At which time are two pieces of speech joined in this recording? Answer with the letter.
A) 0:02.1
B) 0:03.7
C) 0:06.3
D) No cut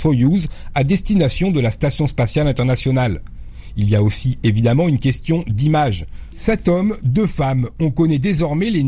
C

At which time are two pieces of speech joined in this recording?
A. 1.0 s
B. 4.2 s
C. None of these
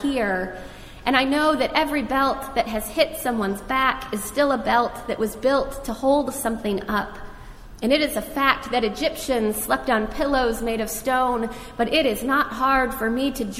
C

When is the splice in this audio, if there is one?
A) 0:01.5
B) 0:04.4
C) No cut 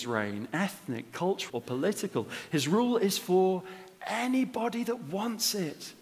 A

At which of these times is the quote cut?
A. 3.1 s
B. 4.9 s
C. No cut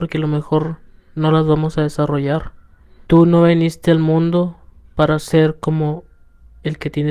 A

